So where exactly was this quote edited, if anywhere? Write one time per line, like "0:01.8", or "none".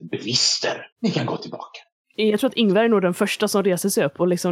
0:00.9